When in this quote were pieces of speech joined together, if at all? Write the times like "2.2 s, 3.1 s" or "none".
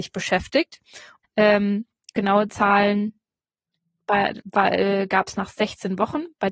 1.2 s